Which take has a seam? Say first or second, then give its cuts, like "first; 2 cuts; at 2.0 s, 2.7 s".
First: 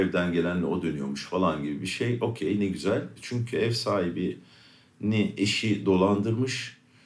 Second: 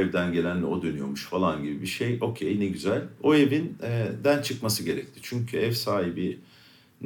first; 1 cut; at 3.2 s